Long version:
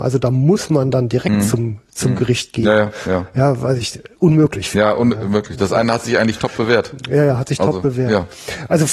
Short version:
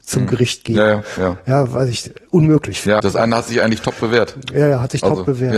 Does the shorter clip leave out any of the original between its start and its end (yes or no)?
yes